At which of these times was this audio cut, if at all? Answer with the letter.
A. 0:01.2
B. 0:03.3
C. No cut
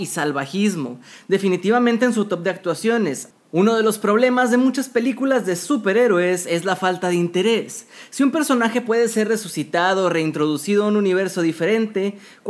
B